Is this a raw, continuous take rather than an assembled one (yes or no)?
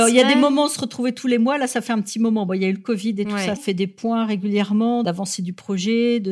no